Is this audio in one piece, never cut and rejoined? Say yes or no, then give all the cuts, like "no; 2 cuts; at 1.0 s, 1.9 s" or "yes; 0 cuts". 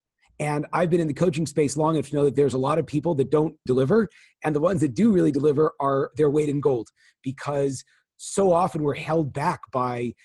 no; 2 cuts; at 3.7 s, 6.1 s